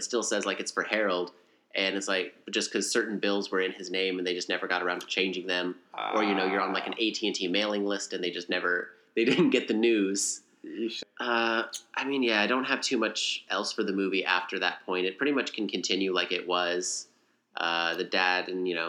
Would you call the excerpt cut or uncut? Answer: cut